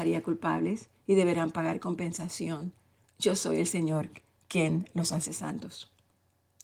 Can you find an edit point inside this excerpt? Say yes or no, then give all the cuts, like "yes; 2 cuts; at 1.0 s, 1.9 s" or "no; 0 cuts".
no; 0 cuts